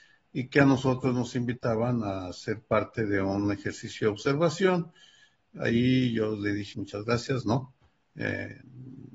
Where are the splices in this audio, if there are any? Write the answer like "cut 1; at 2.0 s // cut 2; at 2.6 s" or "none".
cut 1; at 6.7 s